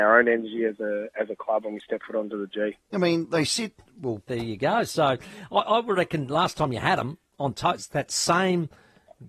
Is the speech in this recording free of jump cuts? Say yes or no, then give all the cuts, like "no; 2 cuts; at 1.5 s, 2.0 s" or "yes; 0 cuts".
no; 2 cuts; at 2.9 s, 4.3 s